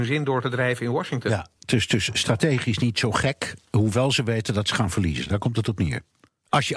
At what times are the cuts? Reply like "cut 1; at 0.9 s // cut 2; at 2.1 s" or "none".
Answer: none